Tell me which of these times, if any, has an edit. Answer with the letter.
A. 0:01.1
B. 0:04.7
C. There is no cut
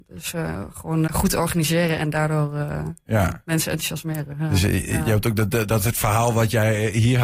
A